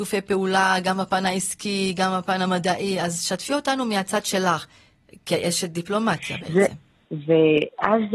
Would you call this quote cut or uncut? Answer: cut